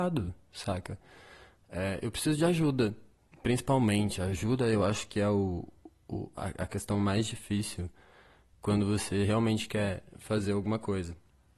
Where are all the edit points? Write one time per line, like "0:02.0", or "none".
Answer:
none